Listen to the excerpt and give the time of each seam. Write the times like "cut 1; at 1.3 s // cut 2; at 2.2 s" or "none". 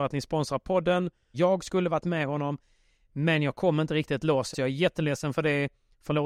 cut 1; at 1.3 s // cut 2; at 4.5 s